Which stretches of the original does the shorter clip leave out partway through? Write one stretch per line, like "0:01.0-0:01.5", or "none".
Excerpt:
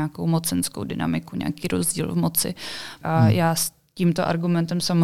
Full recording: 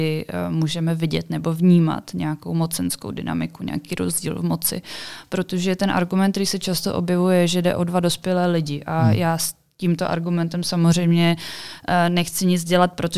0:05.3-0:08.8